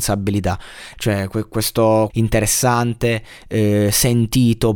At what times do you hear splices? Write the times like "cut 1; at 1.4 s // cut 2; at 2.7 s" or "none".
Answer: cut 1; at 0.9 s // cut 2; at 2.1 s